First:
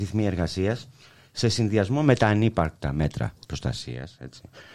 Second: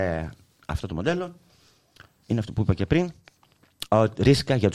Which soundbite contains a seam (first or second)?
first